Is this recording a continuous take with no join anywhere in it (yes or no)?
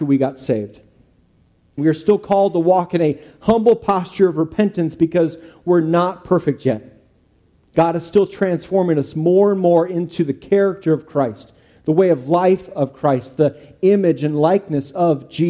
no